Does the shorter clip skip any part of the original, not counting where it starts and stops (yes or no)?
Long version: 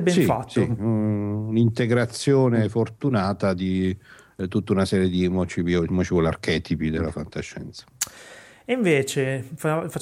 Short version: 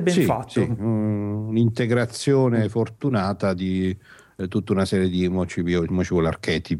no